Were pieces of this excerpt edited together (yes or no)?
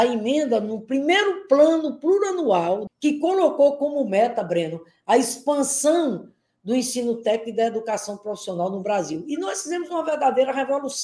yes